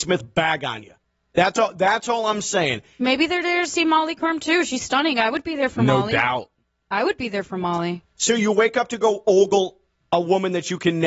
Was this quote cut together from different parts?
no; 0 cuts

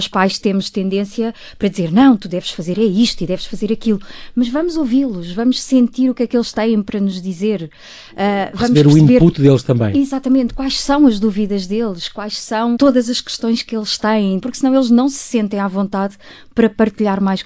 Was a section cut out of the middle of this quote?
yes; 2 cuts; at 12.8 s, 14.4 s

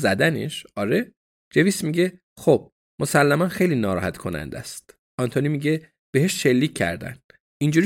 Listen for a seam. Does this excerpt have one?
yes; 1 cut; at 1.4 s

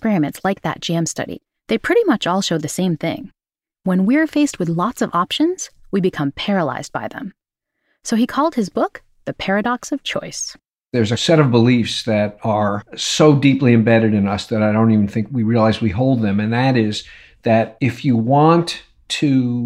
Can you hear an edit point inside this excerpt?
no; 0 cuts

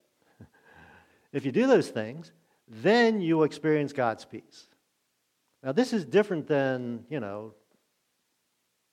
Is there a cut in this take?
no; 0 cuts

